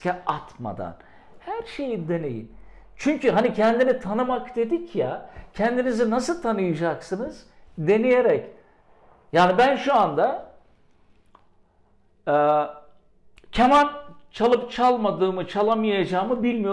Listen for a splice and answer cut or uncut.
uncut